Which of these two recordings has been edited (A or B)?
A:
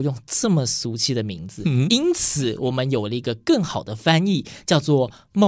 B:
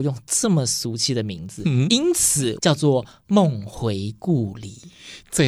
B